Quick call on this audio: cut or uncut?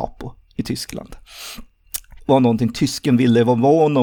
cut